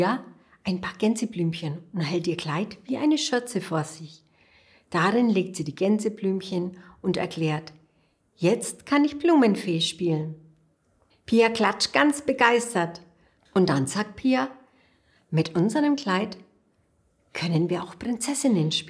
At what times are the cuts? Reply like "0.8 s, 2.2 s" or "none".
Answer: 11.1 s, 13.4 s